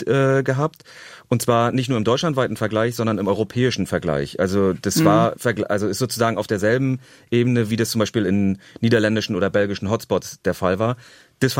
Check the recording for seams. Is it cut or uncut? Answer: uncut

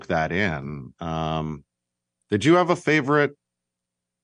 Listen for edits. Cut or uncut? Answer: cut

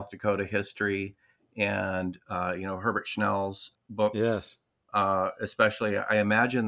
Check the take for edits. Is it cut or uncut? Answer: uncut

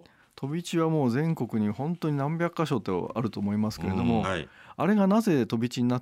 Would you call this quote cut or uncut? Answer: cut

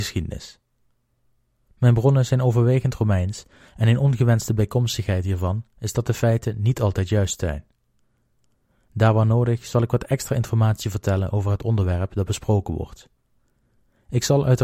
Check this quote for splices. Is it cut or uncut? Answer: uncut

